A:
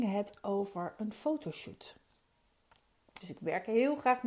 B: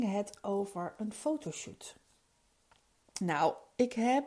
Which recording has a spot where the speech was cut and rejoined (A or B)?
A